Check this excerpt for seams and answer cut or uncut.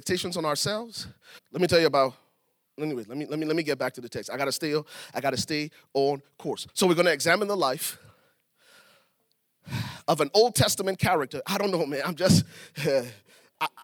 cut